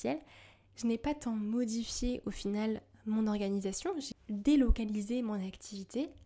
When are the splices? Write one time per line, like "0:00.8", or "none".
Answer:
0:04.1

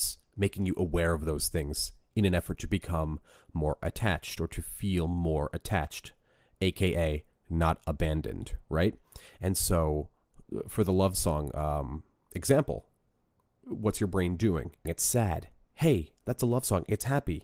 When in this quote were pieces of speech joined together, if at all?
0:14.8

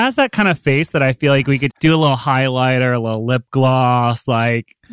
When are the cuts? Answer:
0:01.7

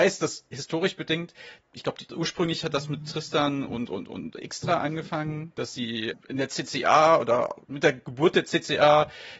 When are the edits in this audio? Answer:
0:06.1
0:07.6

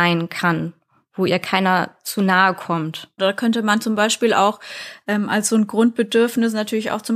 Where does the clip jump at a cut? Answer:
0:03.2

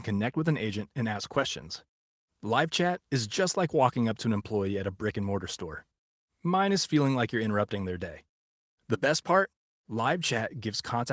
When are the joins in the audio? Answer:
none

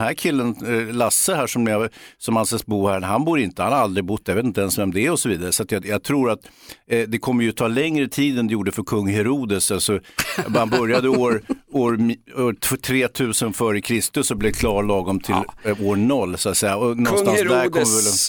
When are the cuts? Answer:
none

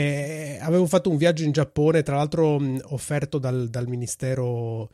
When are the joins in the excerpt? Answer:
none

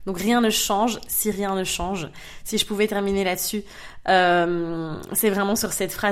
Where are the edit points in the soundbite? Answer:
none

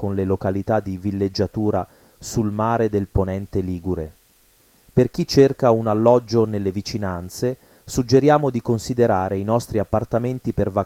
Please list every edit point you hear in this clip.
none

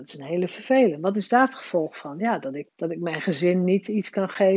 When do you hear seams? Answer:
0:02.7

